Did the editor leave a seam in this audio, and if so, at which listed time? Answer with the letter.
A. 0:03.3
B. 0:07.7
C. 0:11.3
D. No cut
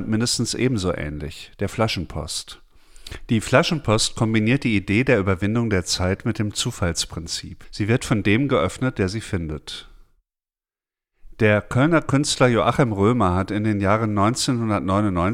D